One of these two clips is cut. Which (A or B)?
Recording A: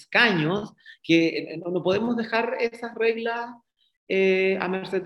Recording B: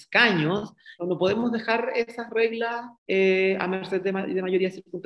B